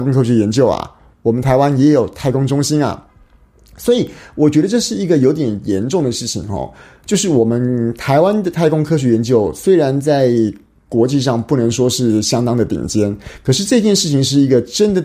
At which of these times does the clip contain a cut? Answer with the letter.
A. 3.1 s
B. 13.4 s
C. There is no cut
C